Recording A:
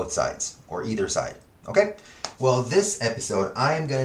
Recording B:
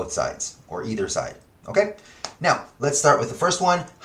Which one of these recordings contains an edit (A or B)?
A